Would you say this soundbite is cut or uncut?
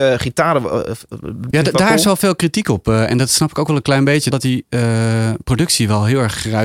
cut